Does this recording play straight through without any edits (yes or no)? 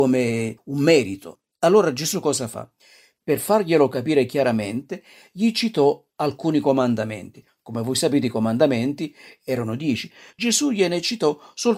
yes